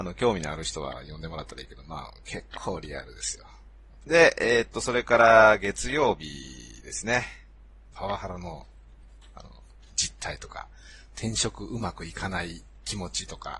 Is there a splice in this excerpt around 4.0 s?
yes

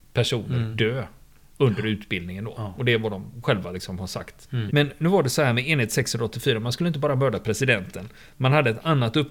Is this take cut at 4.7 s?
yes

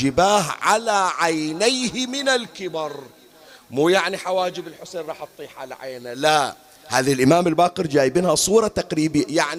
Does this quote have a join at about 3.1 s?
no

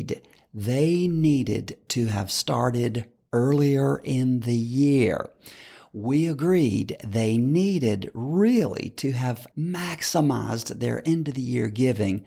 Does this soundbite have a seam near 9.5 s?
yes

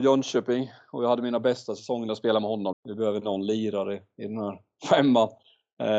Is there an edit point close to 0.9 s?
no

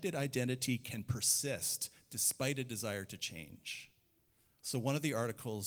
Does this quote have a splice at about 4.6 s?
yes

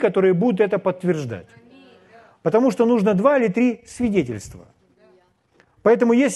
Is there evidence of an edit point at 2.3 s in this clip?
no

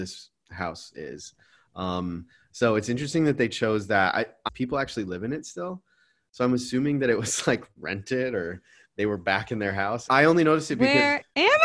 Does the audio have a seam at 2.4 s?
no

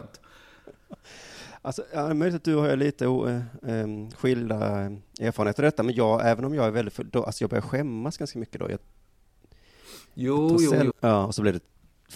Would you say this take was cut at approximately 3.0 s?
no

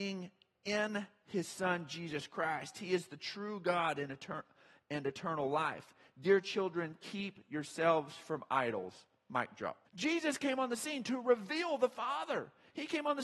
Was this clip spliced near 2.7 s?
no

